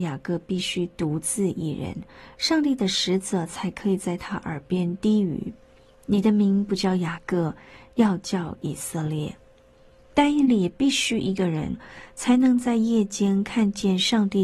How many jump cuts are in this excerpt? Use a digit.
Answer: 0